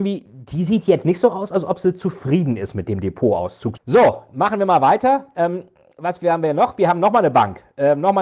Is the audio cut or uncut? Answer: cut